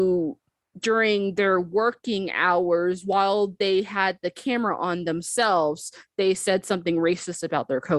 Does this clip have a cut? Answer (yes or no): no